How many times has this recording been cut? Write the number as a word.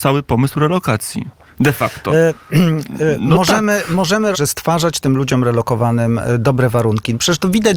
one